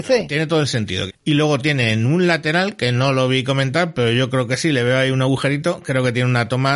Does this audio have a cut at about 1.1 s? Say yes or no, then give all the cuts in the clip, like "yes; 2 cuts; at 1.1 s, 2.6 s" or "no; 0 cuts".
yes; 1 cut; at 1.1 s